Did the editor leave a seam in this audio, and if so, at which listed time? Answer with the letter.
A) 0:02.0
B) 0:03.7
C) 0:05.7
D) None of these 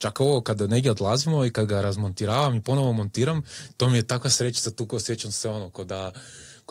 D